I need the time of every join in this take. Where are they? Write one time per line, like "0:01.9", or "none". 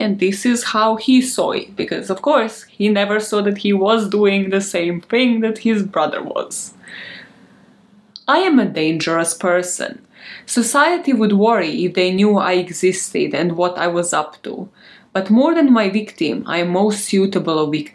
none